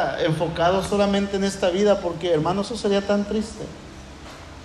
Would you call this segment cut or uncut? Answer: uncut